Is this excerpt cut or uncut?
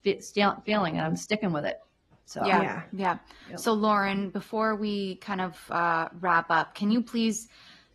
uncut